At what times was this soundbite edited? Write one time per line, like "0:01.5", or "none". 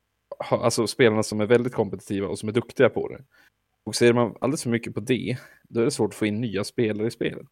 none